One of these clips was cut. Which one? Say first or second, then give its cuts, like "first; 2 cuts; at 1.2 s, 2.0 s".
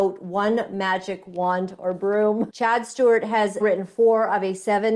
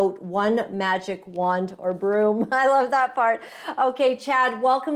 first; 2 cuts; at 2.5 s, 3.6 s